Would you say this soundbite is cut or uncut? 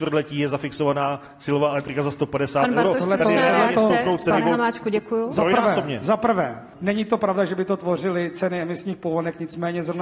cut